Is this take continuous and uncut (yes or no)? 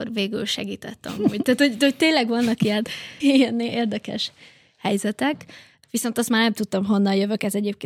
no